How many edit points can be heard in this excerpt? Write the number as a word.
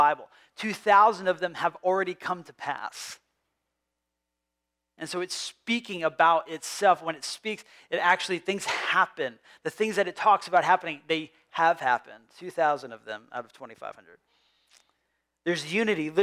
zero